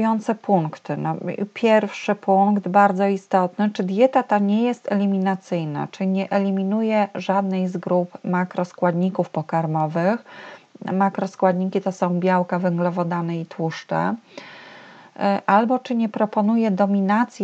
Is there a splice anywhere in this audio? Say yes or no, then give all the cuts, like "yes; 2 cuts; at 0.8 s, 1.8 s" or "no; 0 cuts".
no; 0 cuts